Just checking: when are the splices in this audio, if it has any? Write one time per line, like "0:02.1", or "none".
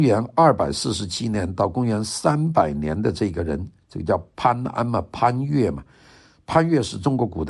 none